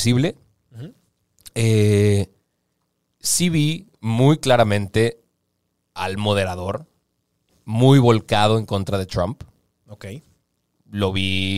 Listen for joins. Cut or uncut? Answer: uncut